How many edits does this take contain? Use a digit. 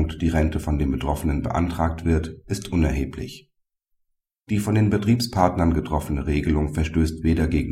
0